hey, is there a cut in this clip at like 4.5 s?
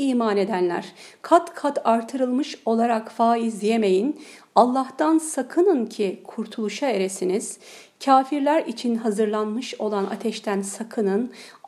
no; 0 cuts

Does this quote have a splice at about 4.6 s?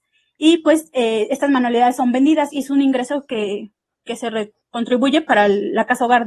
yes; 1 cut; at 4.6 s

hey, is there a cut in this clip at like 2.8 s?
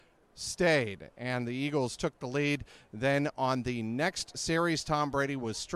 no; 0 cuts

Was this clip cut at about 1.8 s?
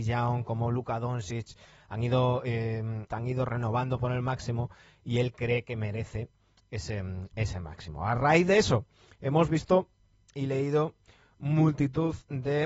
no; 1 cut; at 3.1 s

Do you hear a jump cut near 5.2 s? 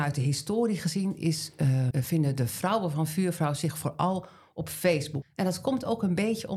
yes; 2 cuts; at 1.9 s, 5.2 s

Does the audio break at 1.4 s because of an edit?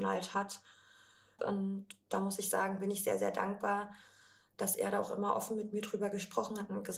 yes; 1 cut; at 1.4 s

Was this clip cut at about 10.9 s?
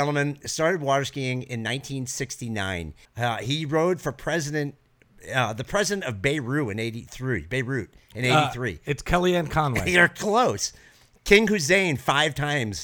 no; 1 cut; at 3.0 s

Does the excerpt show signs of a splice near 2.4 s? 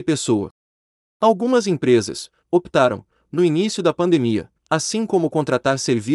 yes; 2 cuts; at 2.4 s, 4.6 s

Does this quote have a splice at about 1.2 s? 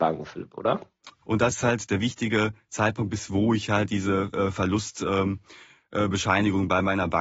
yes; 1 cut; at 1.2 s

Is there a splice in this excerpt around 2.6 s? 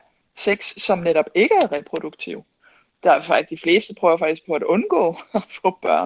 no; 0 cuts

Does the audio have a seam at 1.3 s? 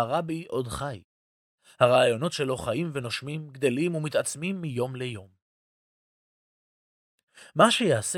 no; 0 cuts

